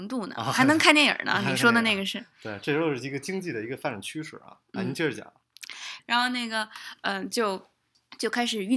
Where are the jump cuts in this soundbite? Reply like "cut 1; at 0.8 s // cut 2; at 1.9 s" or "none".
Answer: cut 1; at 6.0 s